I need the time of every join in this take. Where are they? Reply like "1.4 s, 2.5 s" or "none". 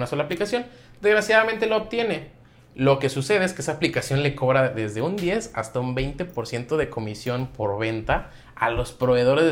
none